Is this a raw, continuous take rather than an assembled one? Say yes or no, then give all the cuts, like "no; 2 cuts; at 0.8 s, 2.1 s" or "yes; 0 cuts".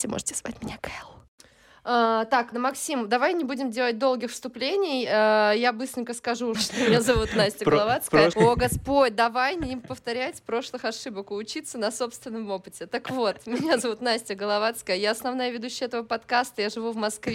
no; 3 cuts; at 2.5 s, 6.5 s, 8.3 s